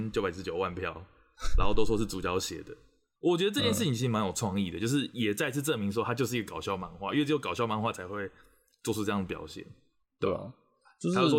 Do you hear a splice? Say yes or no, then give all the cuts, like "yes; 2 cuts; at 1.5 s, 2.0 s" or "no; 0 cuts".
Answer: no; 0 cuts